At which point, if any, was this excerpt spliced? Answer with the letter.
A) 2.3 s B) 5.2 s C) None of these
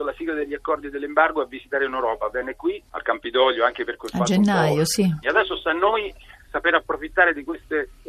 B